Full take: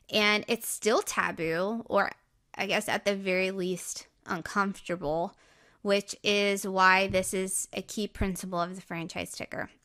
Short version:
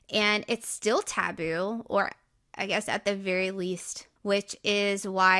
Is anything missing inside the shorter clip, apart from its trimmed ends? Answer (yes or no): yes